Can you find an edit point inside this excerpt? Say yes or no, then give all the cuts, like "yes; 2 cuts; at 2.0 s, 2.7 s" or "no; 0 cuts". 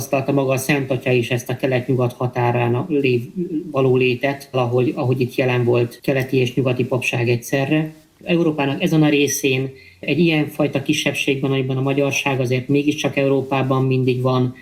yes; 2 cuts; at 4.5 s, 8.2 s